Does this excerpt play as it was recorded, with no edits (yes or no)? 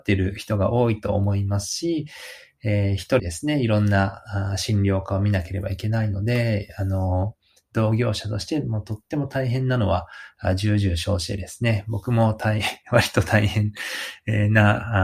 no